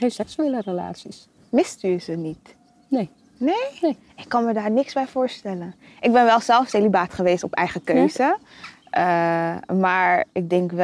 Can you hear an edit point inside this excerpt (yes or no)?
no